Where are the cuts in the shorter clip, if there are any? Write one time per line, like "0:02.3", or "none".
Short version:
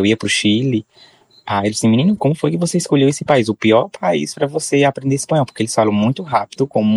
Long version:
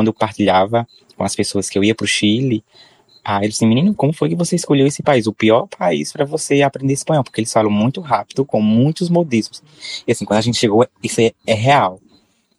none